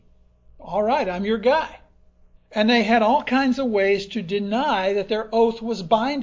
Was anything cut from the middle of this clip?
yes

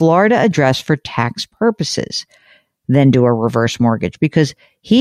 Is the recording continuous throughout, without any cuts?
no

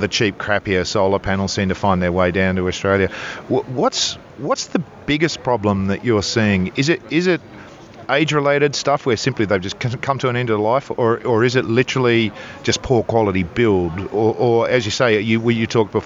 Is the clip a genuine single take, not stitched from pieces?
yes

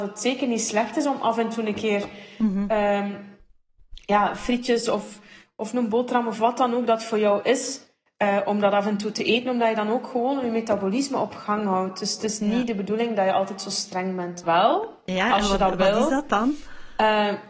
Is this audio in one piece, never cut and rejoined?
no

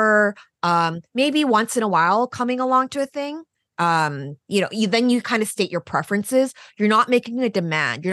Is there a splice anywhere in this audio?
no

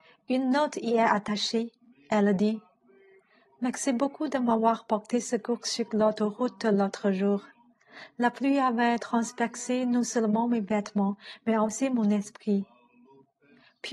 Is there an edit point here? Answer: no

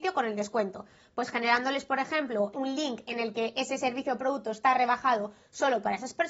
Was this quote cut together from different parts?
yes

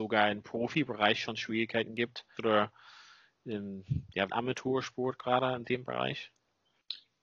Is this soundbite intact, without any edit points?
no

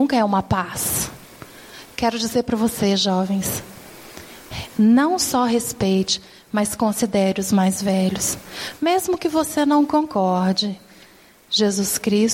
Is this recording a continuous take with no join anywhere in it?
yes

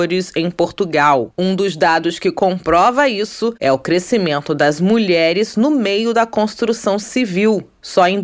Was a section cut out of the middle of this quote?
no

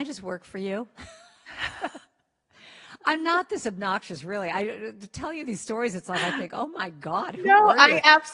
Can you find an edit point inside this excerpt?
no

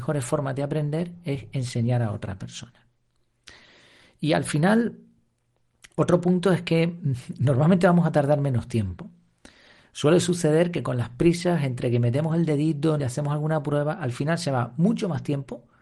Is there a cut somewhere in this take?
yes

